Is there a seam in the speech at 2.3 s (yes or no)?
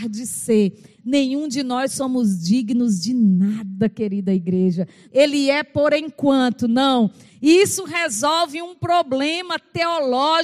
no